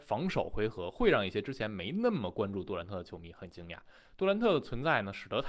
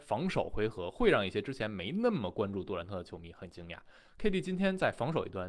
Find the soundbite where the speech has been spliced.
first; 1 cut; at 4.1 s

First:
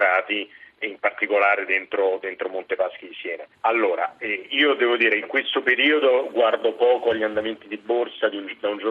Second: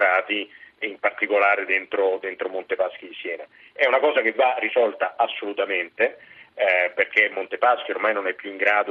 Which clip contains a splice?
first; 1 cut; at 3.5 s

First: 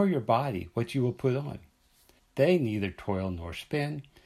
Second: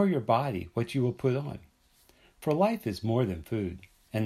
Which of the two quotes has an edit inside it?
first; 1 cut; at 2.2 s

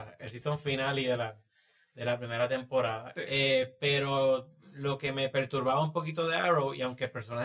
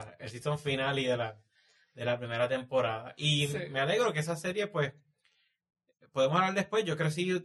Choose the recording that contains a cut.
first; 1 cut; at 3.2 s

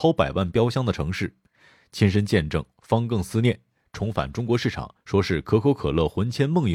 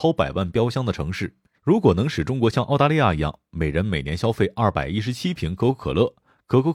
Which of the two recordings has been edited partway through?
second; 1 cut; at 1.6 s

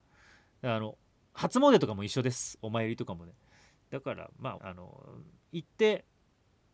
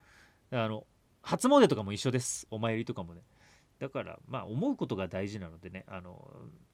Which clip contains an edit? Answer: first; 1 cut; at 4.6 s

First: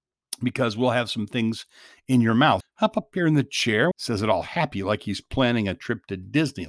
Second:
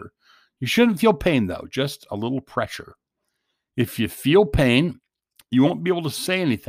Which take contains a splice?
first; 2 cuts; at 2.6 s, 3.9 s

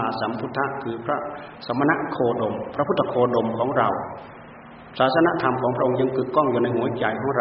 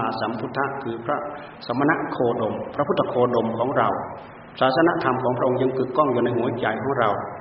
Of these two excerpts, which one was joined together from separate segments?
second; 1 cut; at 4.5 s

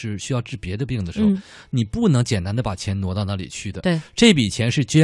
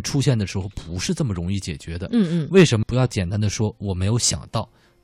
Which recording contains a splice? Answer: second; 1 cut; at 2.8 s

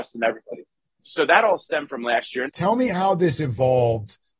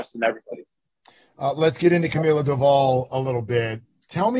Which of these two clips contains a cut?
first; 2 cuts; at 1.0 s, 2.5 s

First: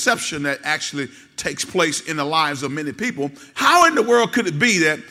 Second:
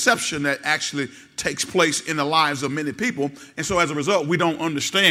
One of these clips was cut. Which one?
first; 1 cut; at 3.5 s

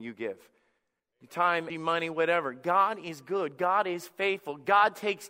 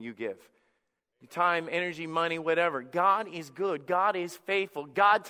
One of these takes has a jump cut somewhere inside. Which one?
first; 1 cut; at 1.7 s

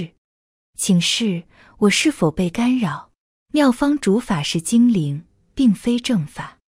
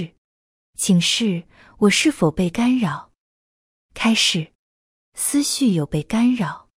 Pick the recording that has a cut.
first; 1 cut; at 3.3 s

